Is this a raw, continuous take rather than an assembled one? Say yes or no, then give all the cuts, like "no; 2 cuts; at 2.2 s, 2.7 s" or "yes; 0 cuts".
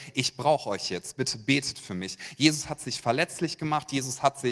yes; 0 cuts